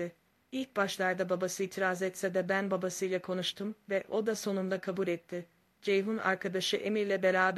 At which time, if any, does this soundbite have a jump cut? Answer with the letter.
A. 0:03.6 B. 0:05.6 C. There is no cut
C